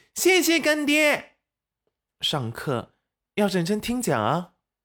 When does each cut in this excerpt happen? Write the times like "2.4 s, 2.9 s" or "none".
2.1 s